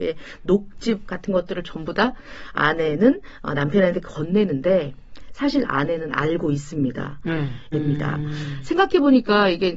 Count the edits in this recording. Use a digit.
1